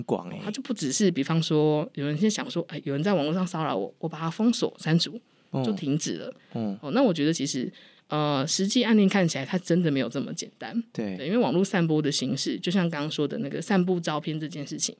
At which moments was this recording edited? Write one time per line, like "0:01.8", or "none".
none